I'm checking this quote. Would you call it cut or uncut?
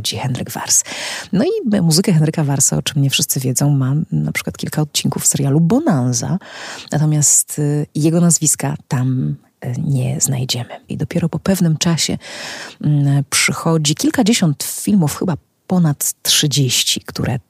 cut